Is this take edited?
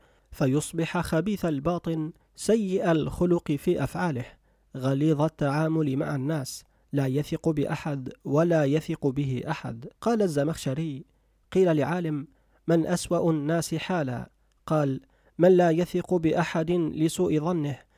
yes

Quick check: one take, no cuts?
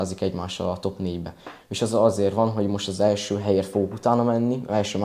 no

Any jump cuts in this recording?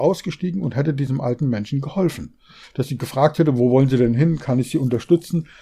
no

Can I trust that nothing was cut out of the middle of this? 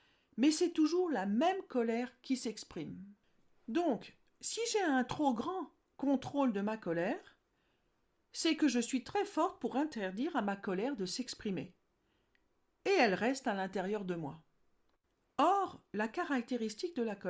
yes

